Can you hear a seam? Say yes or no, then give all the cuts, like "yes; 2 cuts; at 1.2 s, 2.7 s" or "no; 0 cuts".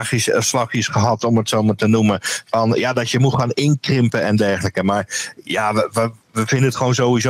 no; 0 cuts